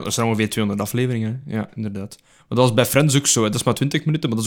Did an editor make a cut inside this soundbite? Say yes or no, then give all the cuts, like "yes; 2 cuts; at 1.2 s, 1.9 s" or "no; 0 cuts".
no; 0 cuts